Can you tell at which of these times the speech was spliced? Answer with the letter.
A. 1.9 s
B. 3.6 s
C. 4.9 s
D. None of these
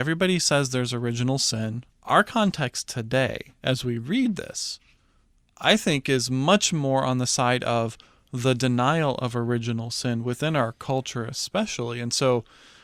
A